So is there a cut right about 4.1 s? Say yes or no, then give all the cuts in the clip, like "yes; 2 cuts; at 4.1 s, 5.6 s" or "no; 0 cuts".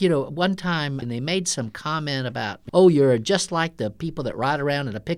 no; 2 cuts; at 1.0 s, 2.7 s